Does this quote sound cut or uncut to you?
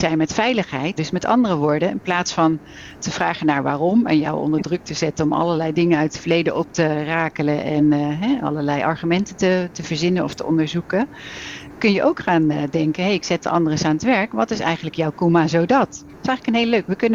cut